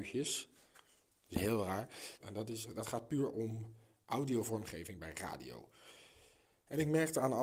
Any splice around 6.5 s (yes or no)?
no